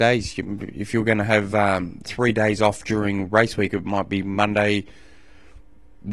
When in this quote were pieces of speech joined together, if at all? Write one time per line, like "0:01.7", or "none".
none